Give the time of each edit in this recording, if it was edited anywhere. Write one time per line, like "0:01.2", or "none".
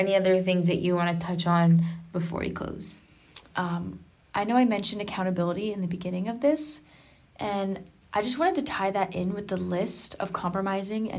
0:03.5